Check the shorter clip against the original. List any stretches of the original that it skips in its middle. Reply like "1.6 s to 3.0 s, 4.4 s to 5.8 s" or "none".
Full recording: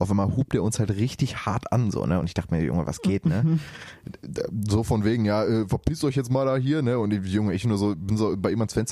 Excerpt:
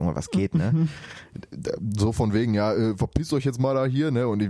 none